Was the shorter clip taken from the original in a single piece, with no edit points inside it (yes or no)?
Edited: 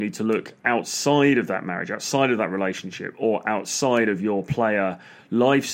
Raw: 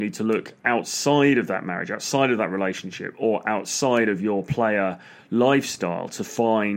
yes